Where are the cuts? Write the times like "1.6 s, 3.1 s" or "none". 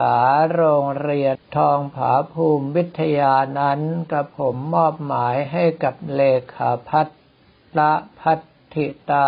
none